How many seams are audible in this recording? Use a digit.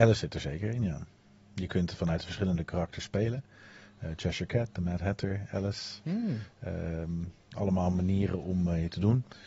0